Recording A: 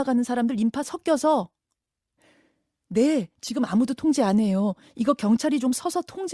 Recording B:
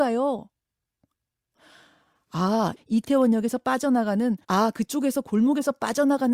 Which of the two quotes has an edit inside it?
B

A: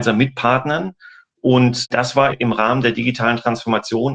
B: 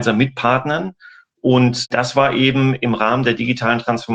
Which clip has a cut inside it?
A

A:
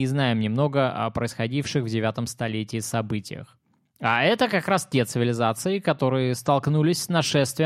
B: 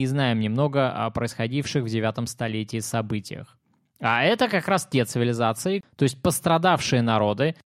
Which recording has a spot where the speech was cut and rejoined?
B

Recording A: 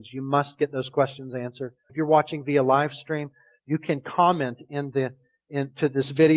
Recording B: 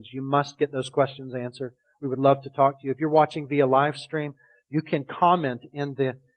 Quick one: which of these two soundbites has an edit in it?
A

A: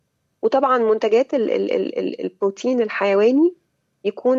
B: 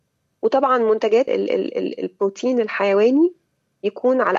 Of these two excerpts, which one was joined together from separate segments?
B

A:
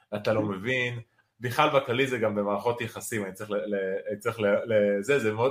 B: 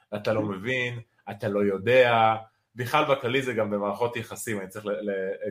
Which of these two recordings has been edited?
A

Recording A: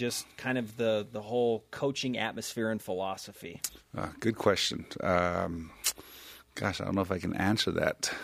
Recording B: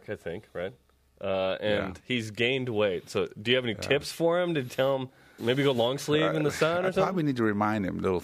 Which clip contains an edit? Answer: B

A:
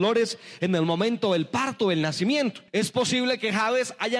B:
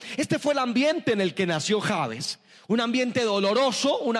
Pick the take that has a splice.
A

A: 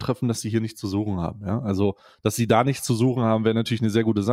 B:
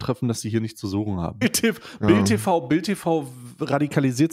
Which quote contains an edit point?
B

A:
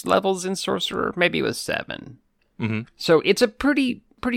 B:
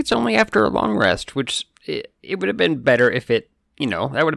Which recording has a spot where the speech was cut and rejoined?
A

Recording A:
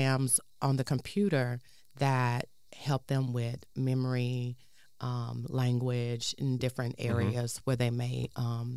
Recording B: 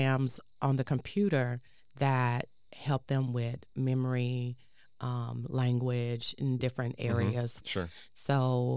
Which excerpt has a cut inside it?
B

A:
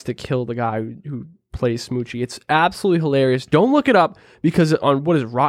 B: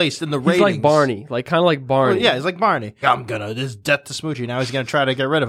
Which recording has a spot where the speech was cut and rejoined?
B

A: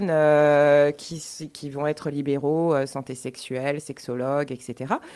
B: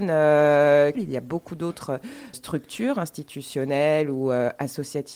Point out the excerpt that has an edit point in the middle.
B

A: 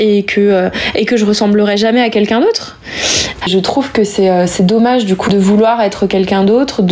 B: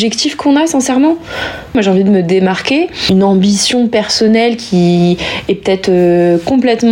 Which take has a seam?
A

